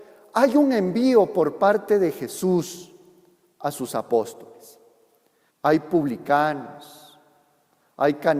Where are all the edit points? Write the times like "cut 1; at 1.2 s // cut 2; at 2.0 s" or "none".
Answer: cut 1; at 5.5 s